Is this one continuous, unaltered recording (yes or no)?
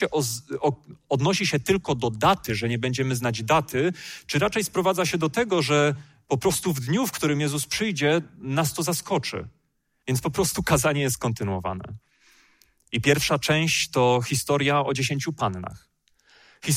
no